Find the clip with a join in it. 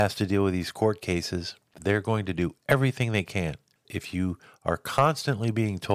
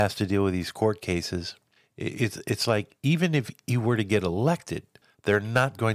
first; 2 cuts; at 1.7 s, 3.8 s

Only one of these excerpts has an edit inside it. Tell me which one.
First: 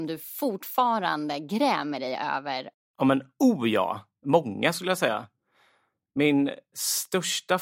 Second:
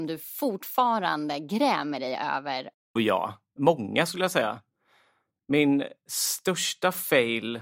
second; 1 cut; at 3.0 s

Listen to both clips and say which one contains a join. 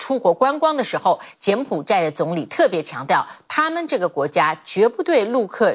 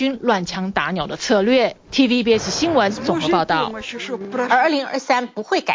second; 1 cut; at 1.9 s

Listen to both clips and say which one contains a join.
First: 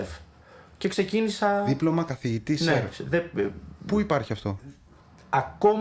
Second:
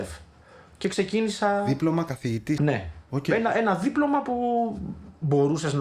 second; 1 cut; at 2.6 s

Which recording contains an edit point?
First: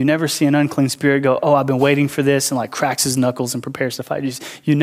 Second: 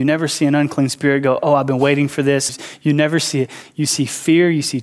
second; 1 cut; at 2.5 s

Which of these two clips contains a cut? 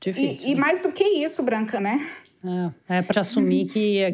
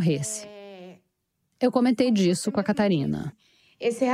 first; 2 cuts; at 1.8 s, 3.1 s

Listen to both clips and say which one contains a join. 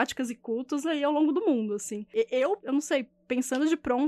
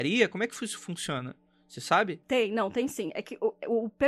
first; 1 cut; at 2.6 s

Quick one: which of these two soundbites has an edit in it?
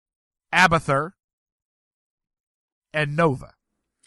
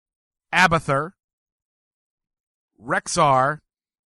first; 1 cut; at 2.7 s

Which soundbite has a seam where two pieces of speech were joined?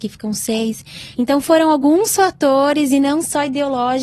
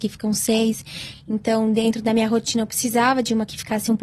first; 1 cut; at 1.1 s

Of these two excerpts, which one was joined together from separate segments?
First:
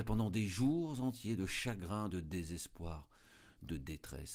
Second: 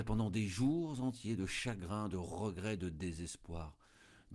first; 1 cut; at 2.1 s

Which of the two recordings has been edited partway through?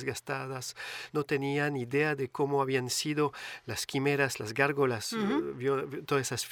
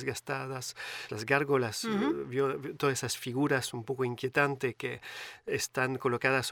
second; 1 cut; at 1.1 s

